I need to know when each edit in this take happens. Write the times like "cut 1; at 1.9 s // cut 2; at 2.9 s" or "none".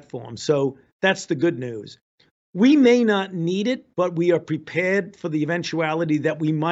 none